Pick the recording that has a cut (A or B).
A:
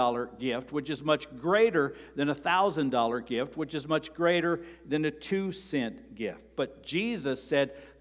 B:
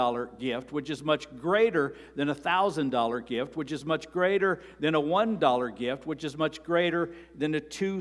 A